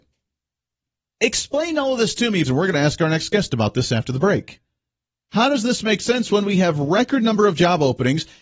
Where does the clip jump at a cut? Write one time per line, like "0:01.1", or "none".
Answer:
0:02.4